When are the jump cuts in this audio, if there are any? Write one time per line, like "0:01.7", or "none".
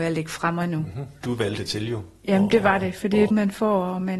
0:01.2
0:03.3